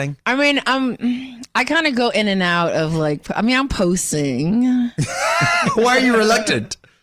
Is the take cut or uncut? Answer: uncut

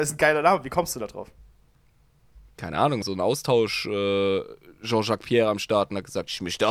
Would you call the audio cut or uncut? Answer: cut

